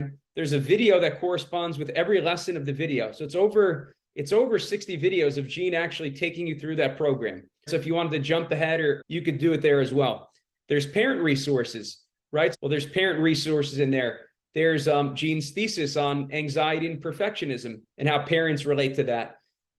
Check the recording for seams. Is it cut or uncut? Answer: cut